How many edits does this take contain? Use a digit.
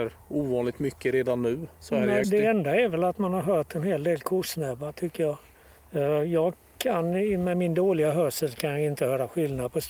1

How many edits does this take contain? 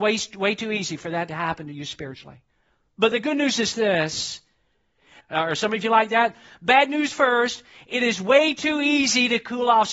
1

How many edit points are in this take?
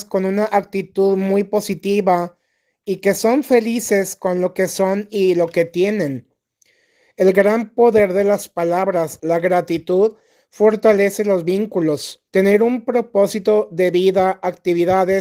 2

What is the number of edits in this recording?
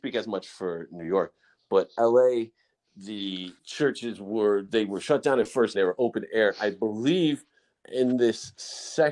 2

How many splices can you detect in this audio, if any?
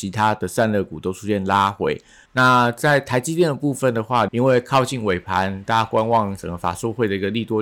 2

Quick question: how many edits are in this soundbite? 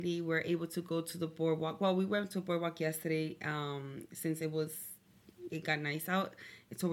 1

